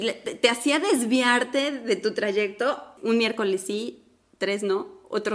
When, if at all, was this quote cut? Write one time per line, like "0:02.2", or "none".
0:03.0